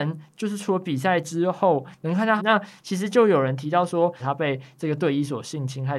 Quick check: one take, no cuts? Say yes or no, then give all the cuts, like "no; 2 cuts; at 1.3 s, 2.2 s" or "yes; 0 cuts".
no; 2 cuts; at 2.4 s, 4.2 s